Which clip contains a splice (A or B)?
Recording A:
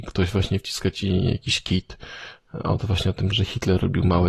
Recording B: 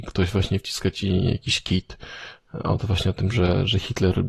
A